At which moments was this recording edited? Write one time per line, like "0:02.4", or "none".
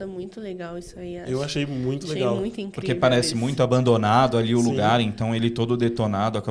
none